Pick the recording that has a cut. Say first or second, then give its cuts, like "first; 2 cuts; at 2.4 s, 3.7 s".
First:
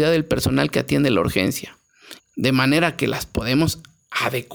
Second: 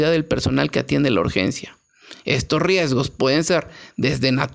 first; 1 cut; at 2.2 s